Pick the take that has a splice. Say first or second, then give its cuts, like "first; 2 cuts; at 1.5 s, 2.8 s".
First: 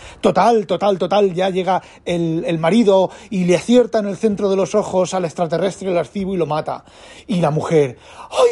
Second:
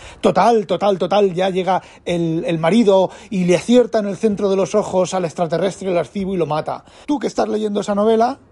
second; 1 cut; at 7.0 s